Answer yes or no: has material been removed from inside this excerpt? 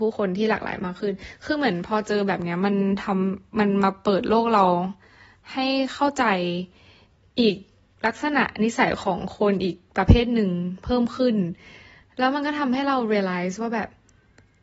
no